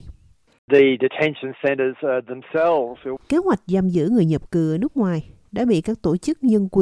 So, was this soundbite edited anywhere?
yes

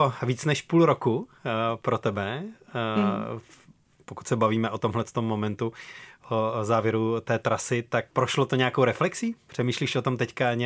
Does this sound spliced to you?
yes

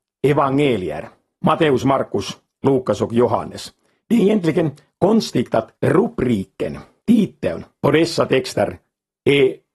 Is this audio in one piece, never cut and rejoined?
yes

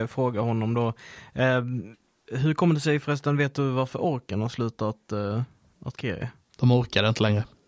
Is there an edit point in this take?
no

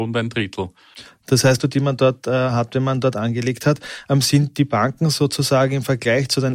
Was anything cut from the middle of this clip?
yes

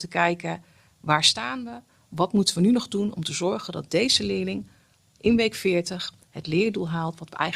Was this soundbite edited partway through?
no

